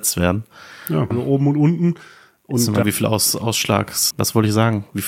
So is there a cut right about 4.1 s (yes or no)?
yes